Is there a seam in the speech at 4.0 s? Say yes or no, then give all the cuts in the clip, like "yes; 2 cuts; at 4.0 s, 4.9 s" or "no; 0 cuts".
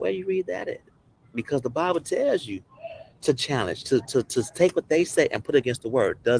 yes; 1 cut; at 4.0 s